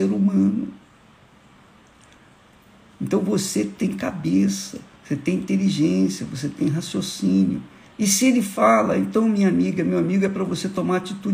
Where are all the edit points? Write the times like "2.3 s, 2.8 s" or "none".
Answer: 5.0 s, 7.9 s